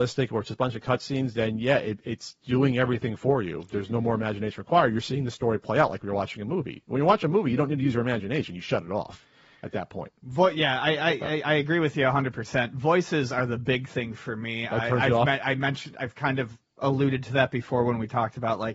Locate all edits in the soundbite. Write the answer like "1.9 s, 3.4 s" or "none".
none